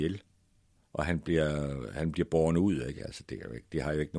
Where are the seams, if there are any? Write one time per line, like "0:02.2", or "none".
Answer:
0:03.0

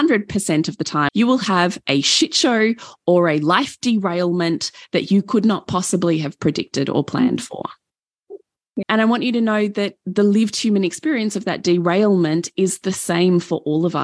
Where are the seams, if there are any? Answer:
0:01.1
0:08.8

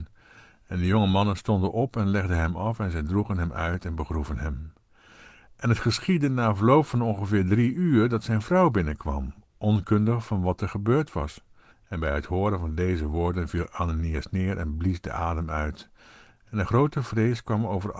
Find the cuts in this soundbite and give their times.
0:11.7

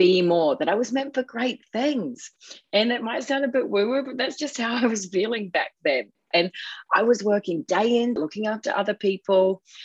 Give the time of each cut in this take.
0:06.3
0:08.2

